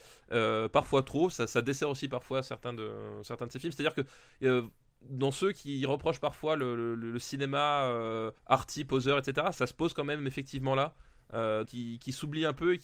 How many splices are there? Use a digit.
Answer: 3